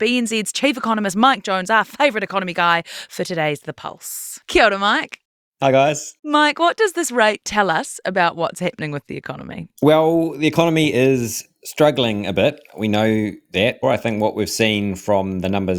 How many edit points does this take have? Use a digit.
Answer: 1